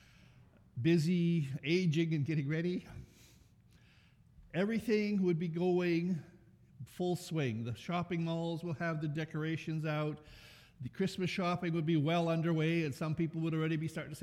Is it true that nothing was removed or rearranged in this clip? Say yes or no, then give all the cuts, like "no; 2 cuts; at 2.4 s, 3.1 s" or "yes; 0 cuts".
yes; 0 cuts